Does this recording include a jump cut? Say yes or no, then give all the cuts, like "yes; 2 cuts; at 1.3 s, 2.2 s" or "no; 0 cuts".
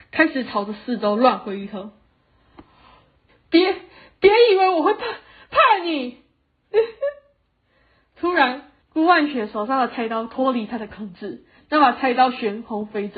yes; 2 cuts; at 3.3 s, 8.8 s